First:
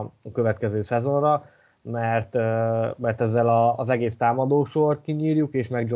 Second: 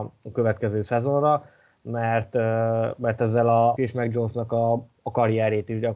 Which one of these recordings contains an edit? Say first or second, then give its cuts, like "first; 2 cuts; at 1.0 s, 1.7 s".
second; 1 cut; at 3.8 s